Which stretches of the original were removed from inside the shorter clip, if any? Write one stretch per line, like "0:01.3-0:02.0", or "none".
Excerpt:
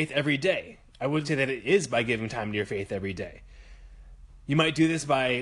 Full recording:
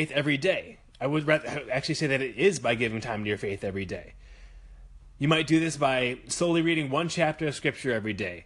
0:01.2-0:02.0